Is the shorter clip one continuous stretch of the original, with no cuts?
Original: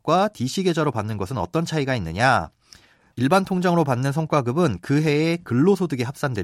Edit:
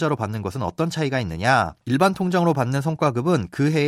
no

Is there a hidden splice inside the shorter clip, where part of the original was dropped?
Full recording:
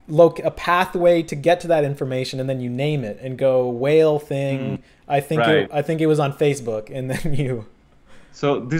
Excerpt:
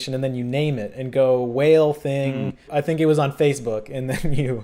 yes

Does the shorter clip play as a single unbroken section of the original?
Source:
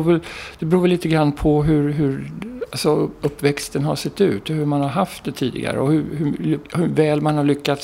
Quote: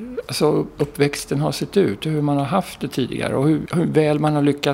no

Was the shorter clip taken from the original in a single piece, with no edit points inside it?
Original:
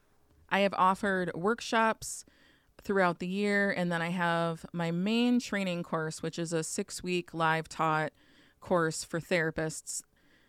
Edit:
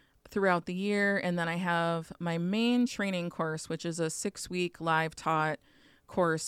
yes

